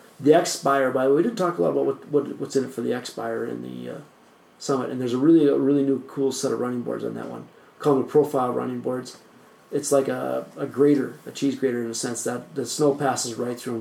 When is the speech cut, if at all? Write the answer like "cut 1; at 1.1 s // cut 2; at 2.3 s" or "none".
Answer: none